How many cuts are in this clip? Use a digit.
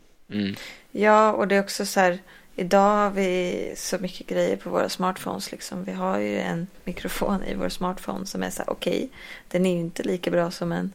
0